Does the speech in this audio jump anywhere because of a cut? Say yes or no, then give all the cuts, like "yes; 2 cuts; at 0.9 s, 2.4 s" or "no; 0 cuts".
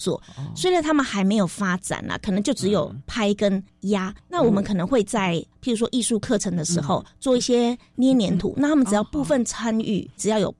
no; 0 cuts